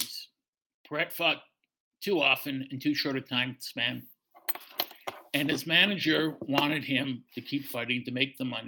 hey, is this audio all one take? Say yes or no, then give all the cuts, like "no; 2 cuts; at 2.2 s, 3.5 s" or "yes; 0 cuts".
yes; 0 cuts